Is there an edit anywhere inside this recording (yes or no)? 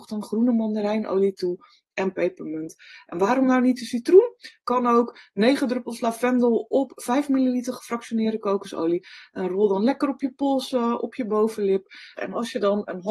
yes